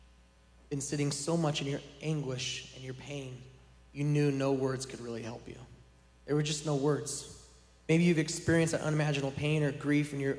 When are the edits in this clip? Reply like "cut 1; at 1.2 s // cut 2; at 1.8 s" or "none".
none